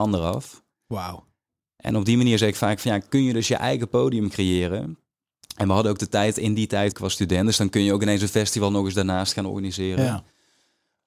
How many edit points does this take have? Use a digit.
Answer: 1